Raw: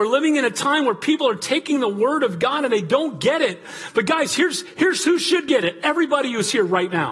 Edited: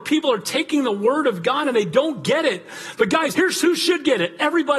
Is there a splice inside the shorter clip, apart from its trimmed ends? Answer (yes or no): yes